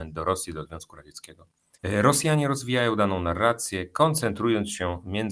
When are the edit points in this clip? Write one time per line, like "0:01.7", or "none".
0:01.8

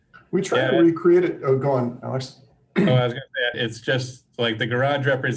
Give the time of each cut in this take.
0:03.5

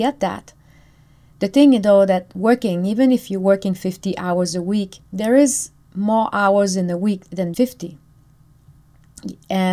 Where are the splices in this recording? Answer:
0:05.1
0:07.5

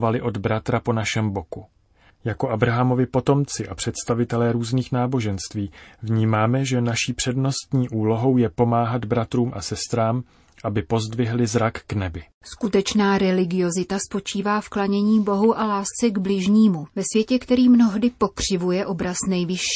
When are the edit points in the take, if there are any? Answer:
0:02.1
0:16.9

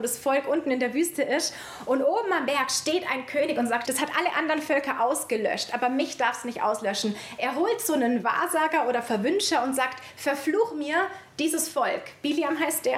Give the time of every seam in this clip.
0:03.8

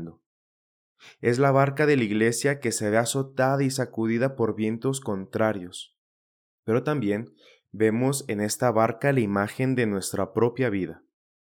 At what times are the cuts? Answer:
0:06.6

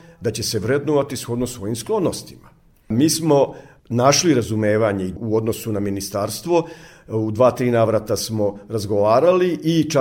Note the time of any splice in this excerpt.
none

